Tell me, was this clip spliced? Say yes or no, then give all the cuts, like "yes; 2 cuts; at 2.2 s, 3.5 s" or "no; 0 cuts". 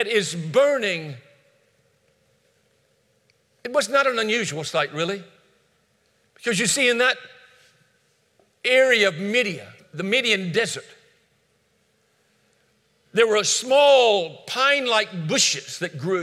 yes; 1 cut; at 9.8 s